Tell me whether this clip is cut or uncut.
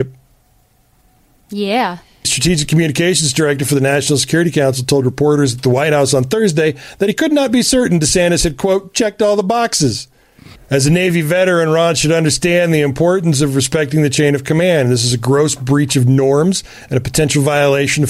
cut